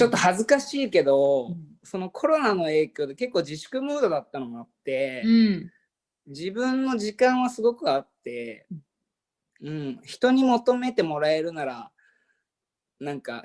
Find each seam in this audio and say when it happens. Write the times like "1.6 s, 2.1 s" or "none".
none